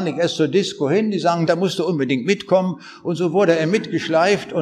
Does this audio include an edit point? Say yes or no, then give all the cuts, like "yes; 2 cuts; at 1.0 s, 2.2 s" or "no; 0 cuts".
yes; 1 cut; at 1.5 s